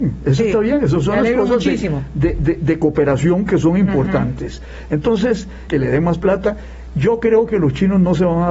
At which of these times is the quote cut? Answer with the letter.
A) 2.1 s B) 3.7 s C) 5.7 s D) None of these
C